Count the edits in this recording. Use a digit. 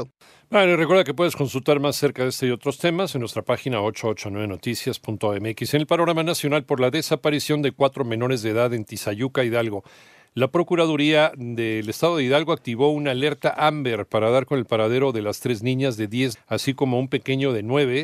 1